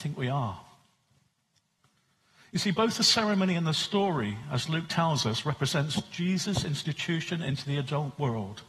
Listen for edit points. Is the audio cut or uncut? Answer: uncut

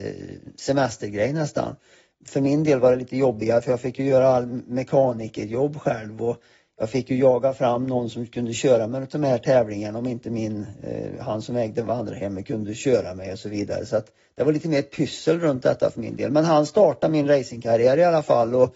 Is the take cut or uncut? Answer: uncut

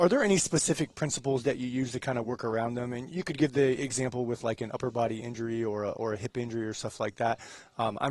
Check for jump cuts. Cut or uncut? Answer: uncut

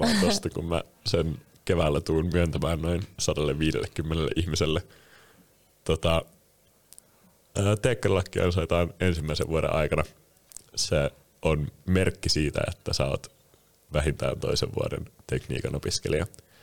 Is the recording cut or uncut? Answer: uncut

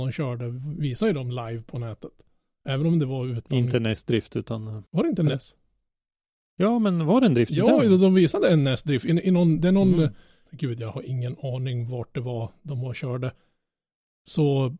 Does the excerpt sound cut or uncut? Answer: cut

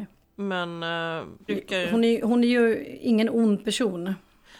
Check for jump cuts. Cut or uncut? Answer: cut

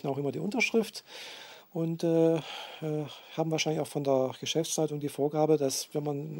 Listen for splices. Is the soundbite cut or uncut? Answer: uncut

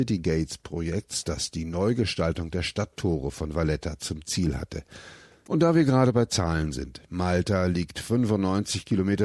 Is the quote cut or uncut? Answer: cut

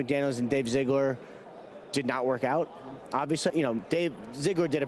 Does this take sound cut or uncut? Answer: cut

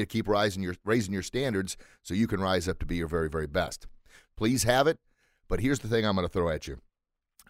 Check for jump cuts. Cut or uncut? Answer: cut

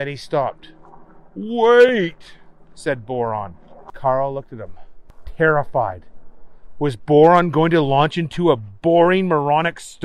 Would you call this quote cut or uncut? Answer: uncut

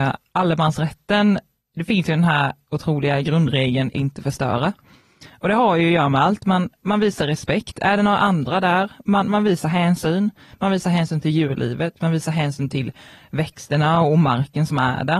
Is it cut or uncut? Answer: cut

